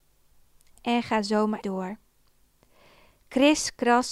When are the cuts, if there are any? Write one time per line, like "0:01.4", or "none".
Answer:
0:01.6